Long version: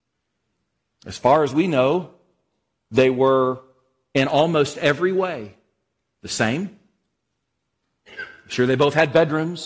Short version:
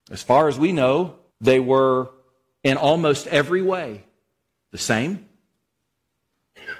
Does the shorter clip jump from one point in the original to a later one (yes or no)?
yes